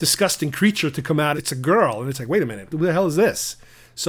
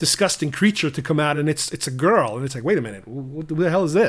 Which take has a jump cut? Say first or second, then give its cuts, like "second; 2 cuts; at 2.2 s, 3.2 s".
first; 2 cuts; at 1.3 s, 2.7 s